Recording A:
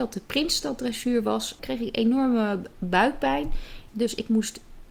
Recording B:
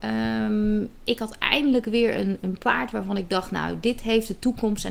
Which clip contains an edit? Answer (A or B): A